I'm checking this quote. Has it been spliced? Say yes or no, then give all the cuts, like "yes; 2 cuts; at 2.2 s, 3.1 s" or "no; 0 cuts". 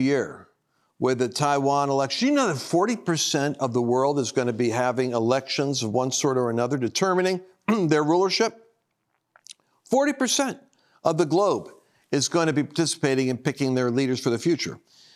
no; 0 cuts